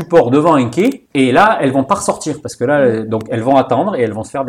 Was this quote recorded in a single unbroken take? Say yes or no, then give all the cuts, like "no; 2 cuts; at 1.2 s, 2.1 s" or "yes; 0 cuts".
yes; 0 cuts